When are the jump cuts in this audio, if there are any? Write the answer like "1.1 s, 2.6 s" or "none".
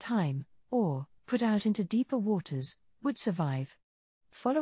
1.2 s